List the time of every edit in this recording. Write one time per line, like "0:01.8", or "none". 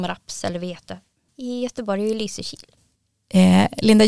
0:01.3